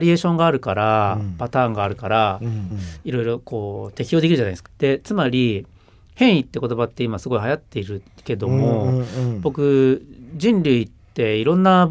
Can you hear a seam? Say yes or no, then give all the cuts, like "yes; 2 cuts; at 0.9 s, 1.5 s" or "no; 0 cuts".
yes; 2 cuts; at 2.7 s, 4.6 s